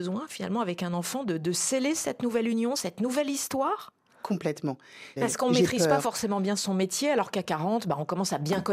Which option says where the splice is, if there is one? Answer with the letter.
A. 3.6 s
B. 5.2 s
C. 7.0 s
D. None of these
B